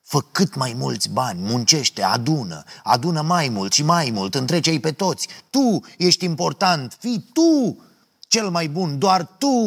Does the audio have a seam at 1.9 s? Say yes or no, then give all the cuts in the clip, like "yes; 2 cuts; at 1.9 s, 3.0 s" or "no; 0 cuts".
no; 0 cuts